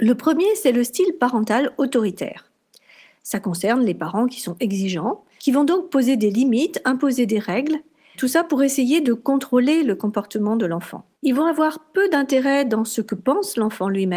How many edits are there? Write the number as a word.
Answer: three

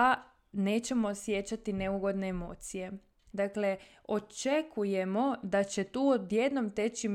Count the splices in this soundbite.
one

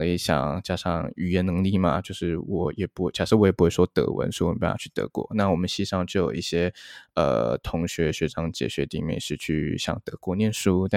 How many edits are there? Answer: zero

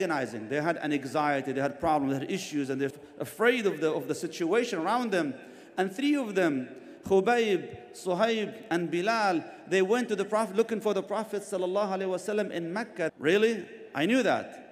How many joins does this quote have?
two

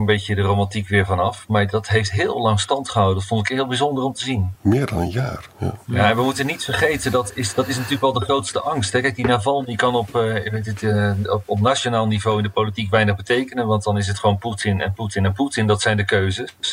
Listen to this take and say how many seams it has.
zero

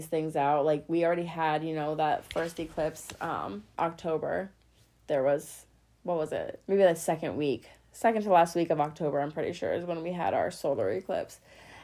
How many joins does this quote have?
two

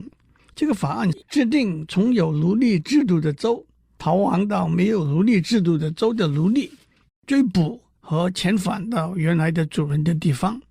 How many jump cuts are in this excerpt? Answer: one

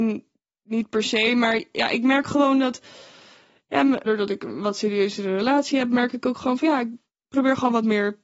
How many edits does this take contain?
one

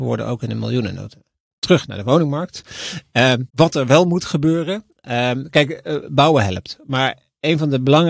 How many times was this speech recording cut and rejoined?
one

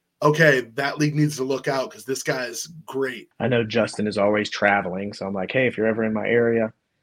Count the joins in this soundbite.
one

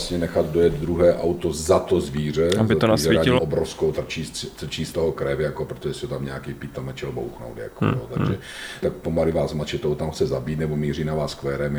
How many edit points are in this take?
two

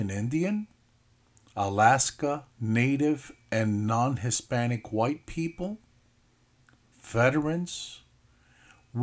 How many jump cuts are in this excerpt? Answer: one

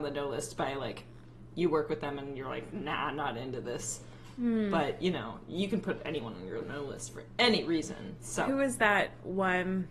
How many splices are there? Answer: zero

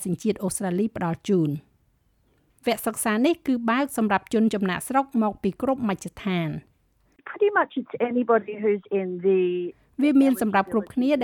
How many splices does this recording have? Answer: zero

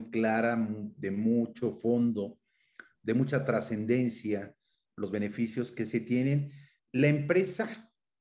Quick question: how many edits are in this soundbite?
one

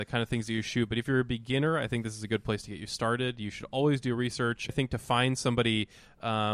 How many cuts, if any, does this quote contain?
one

